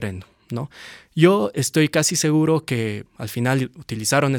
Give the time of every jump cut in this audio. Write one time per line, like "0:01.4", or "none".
0:03.1